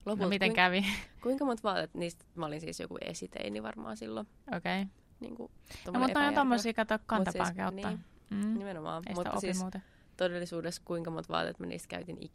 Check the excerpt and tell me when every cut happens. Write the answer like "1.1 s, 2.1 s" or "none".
5.0 s